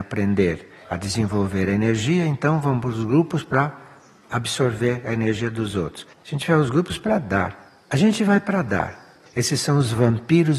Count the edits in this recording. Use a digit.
3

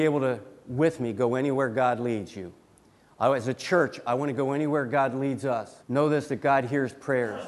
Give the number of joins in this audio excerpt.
1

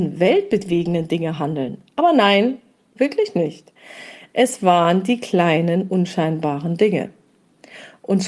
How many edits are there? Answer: 1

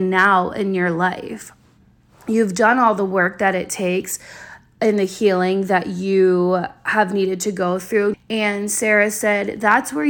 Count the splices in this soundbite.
1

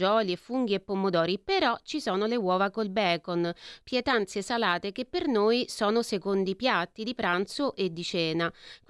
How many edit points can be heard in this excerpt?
1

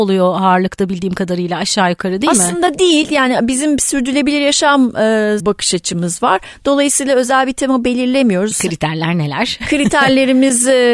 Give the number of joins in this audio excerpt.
2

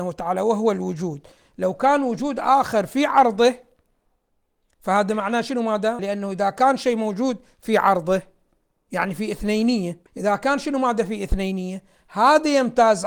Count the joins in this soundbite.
2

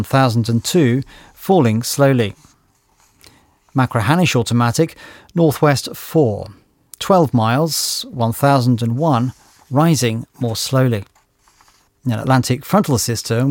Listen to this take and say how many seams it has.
1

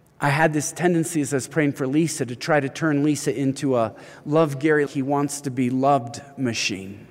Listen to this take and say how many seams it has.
1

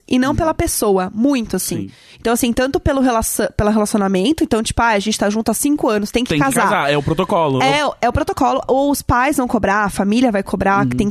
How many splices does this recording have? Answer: 0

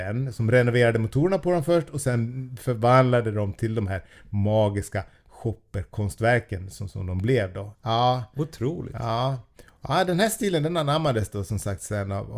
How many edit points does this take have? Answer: 1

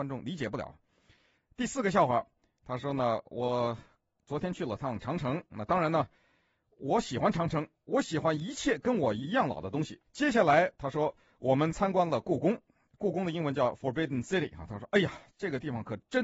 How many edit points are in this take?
1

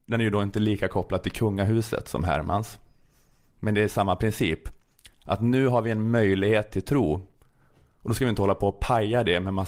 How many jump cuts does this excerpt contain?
0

